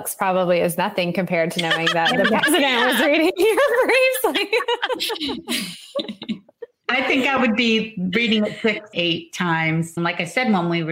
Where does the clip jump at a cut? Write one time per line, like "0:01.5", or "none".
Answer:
0:08.9
0:10.0